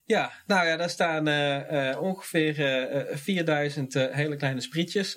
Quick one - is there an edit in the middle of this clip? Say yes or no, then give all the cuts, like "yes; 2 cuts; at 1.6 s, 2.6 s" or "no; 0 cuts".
no; 0 cuts